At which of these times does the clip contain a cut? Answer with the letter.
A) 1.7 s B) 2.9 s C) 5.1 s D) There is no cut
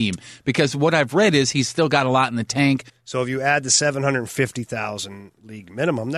B